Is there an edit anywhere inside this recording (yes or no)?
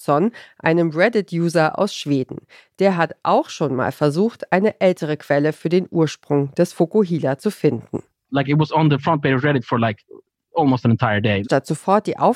yes